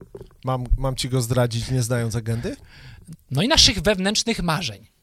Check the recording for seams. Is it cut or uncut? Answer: cut